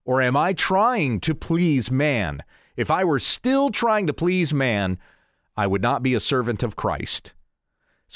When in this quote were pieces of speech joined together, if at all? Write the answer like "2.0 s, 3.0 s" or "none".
none